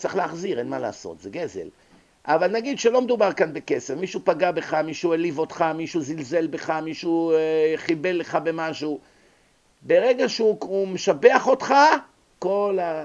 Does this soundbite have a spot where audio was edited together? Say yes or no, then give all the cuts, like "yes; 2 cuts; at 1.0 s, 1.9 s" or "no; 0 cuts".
no; 0 cuts